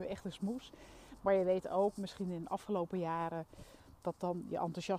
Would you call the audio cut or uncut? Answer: uncut